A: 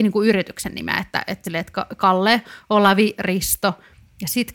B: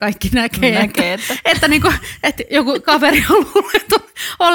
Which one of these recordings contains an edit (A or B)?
A